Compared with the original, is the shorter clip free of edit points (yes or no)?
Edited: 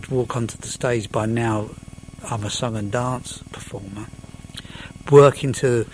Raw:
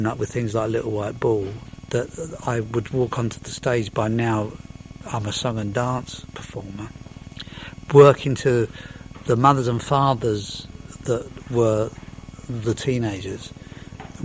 yes